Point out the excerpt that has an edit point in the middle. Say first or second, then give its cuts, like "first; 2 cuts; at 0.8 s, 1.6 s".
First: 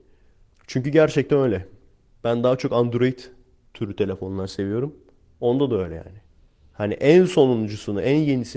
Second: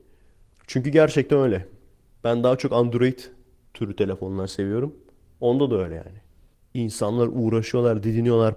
second; 1 cut; at 6.5 s